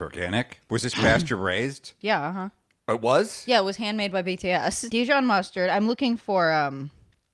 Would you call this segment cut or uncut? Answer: cut